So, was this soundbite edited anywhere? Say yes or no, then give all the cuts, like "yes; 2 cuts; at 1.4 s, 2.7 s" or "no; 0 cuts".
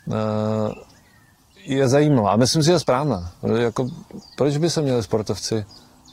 no; 0 cuts